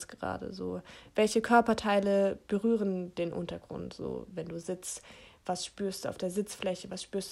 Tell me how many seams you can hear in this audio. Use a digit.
0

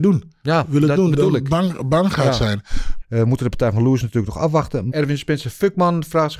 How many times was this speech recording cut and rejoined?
2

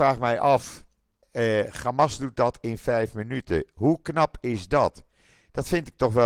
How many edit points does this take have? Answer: 1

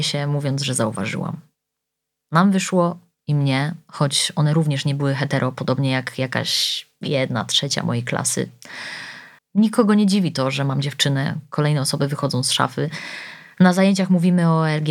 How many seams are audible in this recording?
1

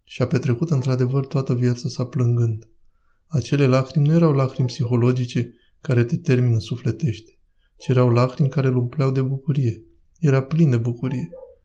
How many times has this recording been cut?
0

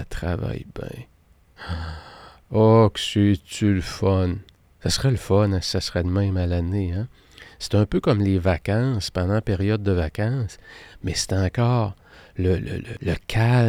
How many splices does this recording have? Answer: 0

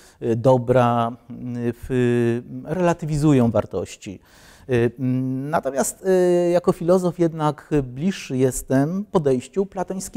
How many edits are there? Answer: 0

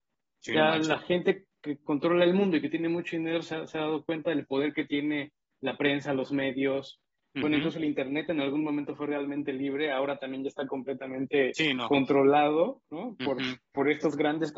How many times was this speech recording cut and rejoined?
0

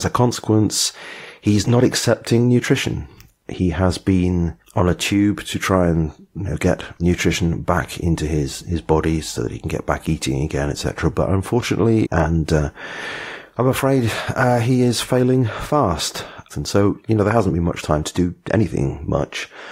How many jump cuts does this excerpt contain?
2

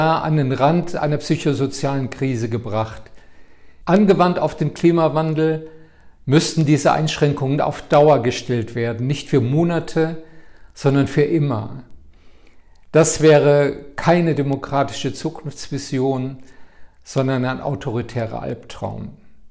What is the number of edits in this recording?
1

